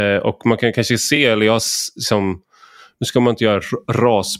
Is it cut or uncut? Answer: uncut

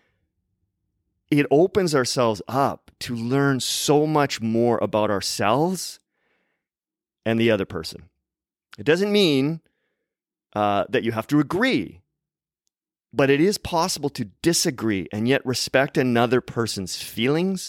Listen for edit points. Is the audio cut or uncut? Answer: uncut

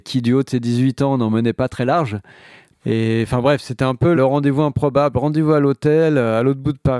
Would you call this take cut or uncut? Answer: cut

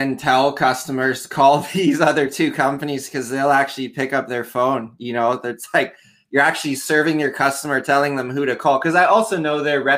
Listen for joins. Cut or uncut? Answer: uncut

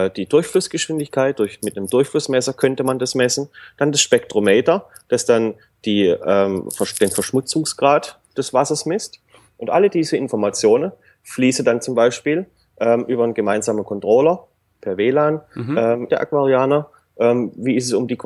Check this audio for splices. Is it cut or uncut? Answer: cut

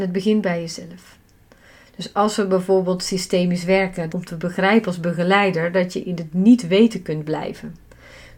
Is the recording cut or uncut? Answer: cut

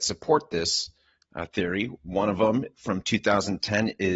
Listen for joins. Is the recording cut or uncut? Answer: uncut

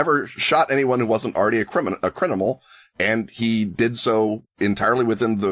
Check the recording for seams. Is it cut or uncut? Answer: uncut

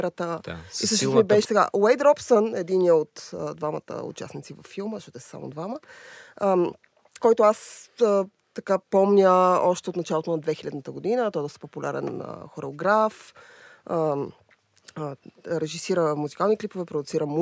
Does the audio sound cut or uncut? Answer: cut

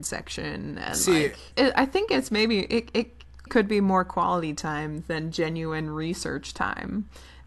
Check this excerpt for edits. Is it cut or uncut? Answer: cut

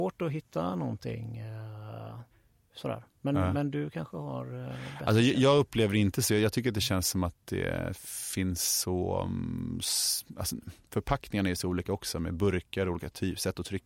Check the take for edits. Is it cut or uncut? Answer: uncut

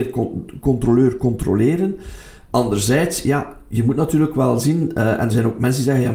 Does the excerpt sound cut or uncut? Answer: uncut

